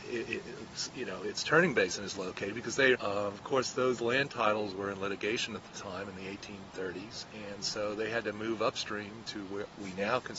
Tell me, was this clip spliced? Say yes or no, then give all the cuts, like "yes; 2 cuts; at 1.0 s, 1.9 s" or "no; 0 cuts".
yes; 1 cut; at 2.9 s